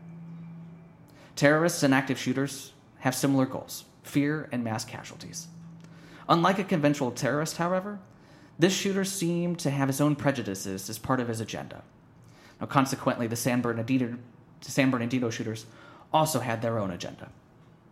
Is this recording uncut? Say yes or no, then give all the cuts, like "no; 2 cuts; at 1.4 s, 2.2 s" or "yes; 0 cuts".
yes; 0 cuts